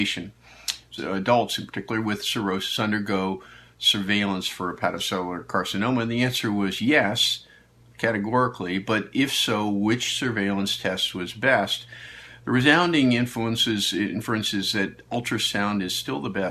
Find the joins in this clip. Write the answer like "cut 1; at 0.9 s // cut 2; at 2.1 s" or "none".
cut 1; at 1.0 s